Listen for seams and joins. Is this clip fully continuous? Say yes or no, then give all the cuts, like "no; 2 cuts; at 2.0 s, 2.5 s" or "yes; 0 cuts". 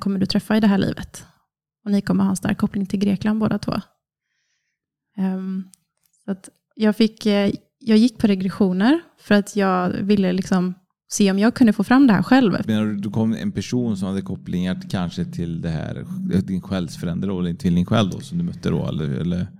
no; 1 cut; at 12.6 s